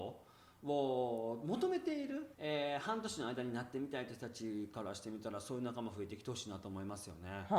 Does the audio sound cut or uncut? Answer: cut